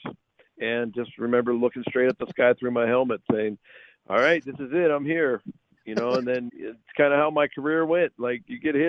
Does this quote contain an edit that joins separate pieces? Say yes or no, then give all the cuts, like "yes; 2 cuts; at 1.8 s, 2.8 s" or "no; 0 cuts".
yes; 1 cut; at 6.5 s